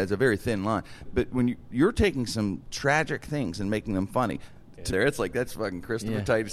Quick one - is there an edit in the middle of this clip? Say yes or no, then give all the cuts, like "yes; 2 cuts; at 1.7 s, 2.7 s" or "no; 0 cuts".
yes; 2 cuts; at 1.1 s, 4.9 s